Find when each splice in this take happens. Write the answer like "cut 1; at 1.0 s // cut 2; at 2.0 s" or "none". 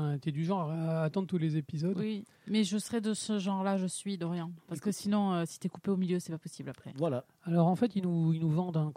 none